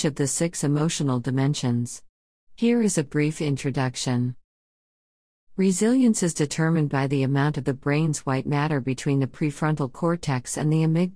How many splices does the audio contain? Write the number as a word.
zero